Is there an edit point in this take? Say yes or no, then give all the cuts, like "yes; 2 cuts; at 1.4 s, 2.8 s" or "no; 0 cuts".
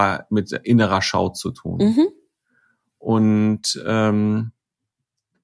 no; 0 cuts